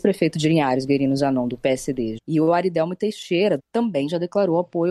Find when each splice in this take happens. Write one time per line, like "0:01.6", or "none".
0:02.2
0:03.6

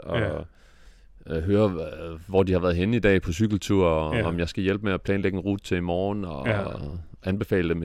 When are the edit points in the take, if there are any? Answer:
none

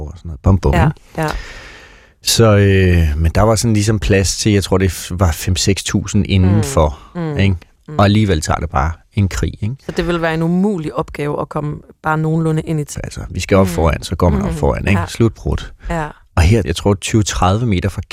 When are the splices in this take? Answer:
0:07.8
0:12.9
0:16.6

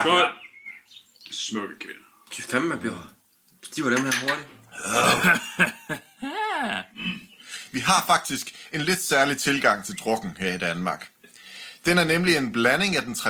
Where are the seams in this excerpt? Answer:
none

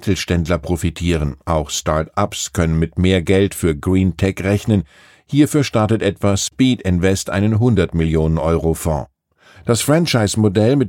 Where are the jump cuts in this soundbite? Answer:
0:09.5

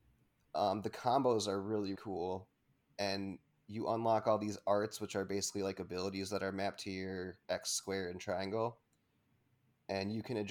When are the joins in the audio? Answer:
0:02.0

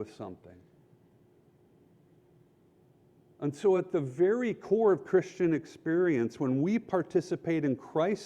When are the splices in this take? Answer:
none

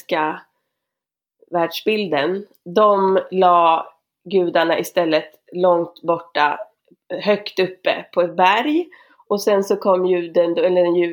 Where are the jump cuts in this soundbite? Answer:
none

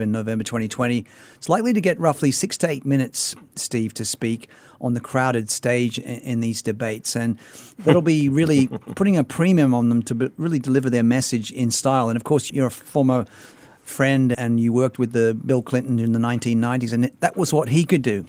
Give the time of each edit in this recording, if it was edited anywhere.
0:12.5
0:14.3

